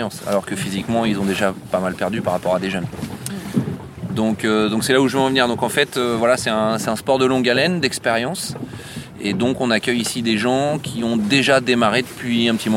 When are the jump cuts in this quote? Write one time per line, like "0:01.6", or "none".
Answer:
none

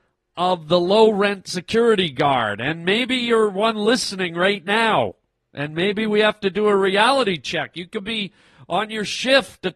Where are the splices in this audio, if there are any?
none

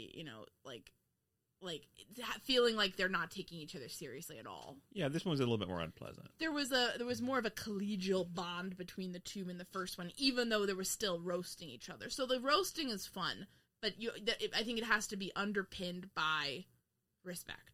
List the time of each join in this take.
none

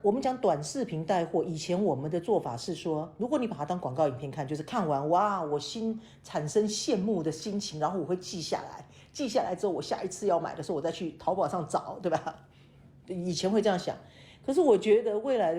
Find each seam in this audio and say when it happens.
none

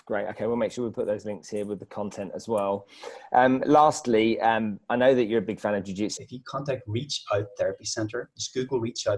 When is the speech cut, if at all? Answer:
0:06.2

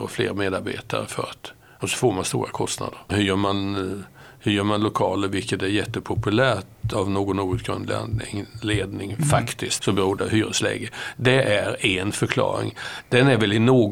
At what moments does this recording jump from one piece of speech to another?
0:03.1
0:09.8

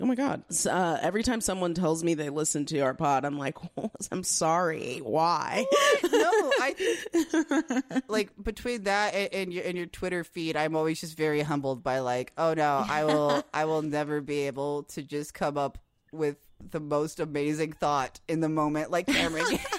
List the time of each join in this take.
none

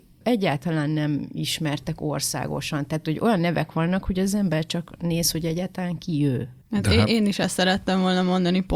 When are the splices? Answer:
none

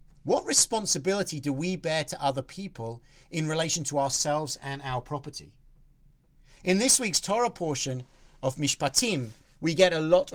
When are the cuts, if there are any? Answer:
none

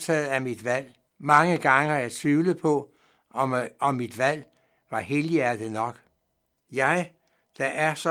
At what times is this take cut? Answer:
0:01.1
0:06.6

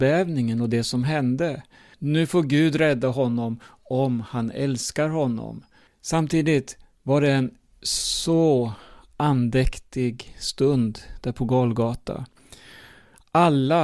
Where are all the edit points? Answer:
0:01.9
0:05.9

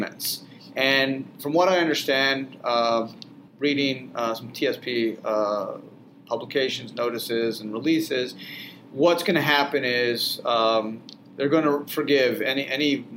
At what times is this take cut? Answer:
0:03.5

